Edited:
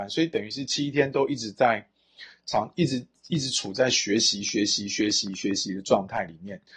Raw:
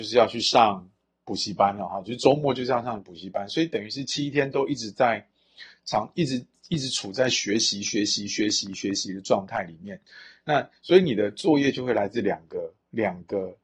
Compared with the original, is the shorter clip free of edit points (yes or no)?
yes